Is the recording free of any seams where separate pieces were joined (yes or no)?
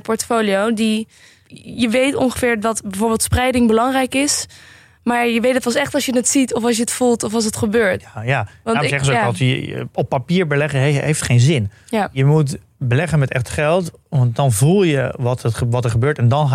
no